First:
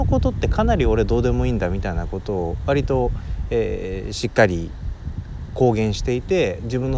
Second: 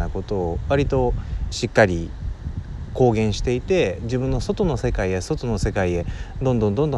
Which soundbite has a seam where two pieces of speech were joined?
second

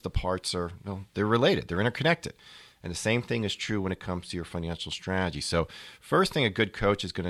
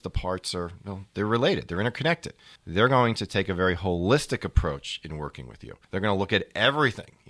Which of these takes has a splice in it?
second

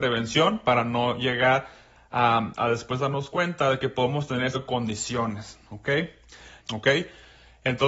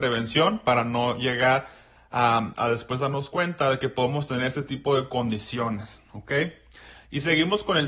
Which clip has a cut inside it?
first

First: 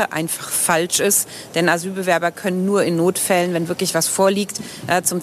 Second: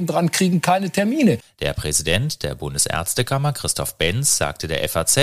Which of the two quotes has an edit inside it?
second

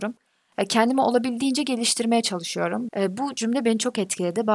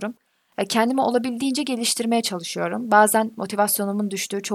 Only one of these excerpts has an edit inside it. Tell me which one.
first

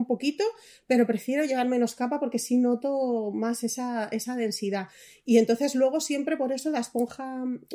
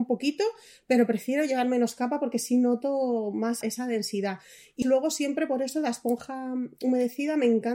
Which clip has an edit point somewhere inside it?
second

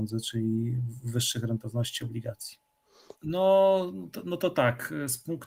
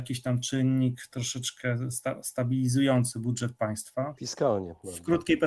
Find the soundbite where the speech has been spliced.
first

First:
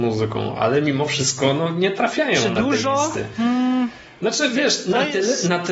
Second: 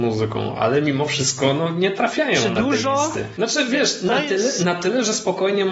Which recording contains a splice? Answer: second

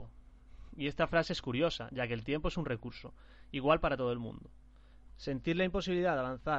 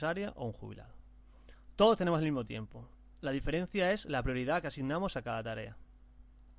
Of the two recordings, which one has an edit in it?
first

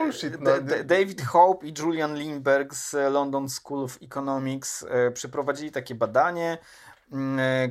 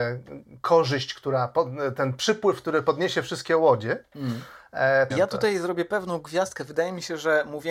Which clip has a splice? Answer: second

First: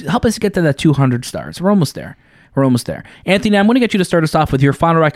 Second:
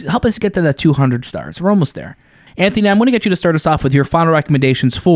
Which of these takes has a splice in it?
second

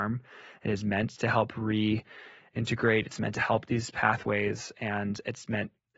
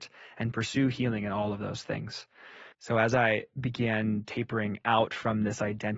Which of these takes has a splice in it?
second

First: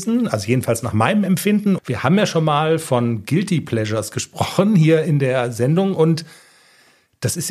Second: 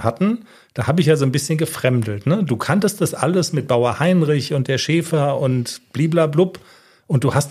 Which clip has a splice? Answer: first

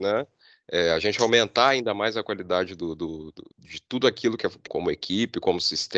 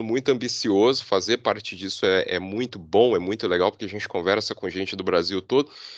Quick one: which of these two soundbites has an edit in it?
first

